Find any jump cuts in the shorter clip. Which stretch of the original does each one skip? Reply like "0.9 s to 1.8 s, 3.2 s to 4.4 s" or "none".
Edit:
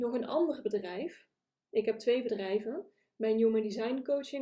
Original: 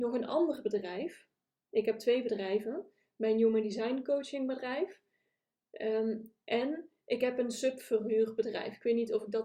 none